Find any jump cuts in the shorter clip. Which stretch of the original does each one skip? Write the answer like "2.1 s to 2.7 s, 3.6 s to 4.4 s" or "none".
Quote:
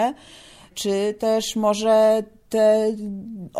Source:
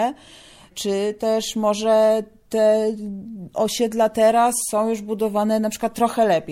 none